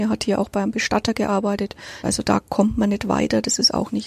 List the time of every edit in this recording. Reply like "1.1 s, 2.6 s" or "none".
2.0 s